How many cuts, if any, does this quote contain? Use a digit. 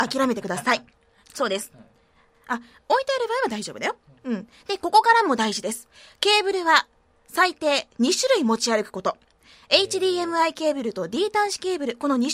1